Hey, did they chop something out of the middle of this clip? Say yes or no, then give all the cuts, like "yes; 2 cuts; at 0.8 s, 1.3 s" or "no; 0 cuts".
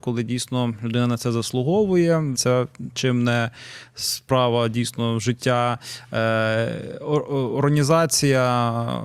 yes; 1 cut; at 2.3 s